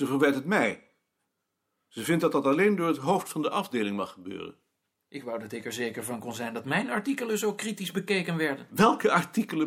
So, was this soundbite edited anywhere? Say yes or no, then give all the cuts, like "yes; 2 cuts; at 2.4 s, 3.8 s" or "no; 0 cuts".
no; 0 cuts